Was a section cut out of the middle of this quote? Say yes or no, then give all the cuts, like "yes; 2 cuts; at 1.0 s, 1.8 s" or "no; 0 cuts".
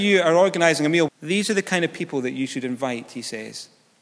yes; 1 cut; at 1.1 s